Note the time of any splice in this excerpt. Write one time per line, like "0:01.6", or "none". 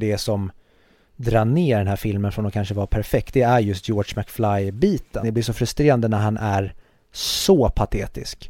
0:05.2